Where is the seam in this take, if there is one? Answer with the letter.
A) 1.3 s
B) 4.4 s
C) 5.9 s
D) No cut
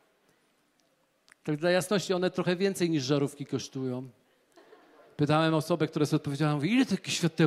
D